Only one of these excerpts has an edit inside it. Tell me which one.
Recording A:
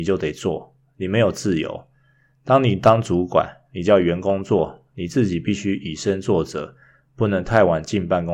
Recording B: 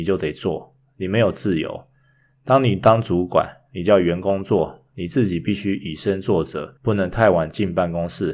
B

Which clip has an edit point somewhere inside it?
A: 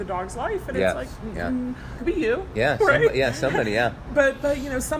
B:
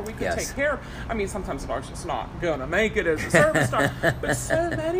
A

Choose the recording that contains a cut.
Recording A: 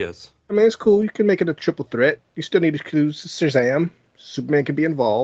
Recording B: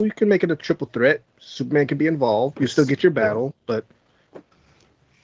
B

